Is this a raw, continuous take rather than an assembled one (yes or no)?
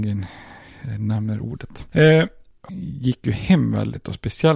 no